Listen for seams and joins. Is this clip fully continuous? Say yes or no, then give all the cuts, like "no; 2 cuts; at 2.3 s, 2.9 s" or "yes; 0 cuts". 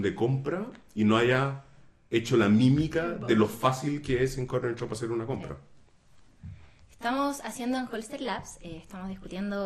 yes; 0 cuts